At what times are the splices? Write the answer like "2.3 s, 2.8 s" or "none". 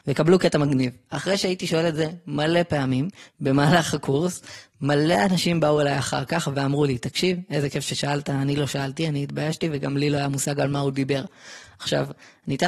none